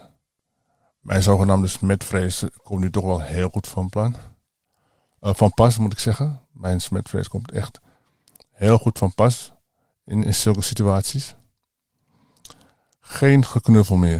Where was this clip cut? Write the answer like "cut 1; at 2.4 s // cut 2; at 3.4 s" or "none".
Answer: cut 1; at 10.2 s